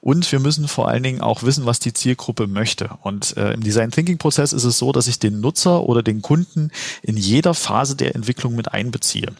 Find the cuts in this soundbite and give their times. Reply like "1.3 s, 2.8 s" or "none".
none